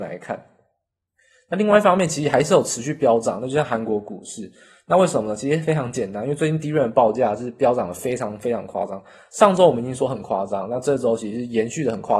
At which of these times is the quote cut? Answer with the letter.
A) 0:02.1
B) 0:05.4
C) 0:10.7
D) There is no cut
D